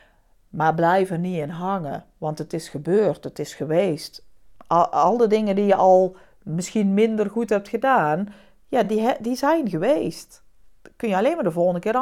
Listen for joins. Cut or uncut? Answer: uncut